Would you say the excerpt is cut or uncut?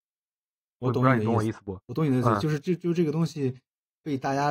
uncut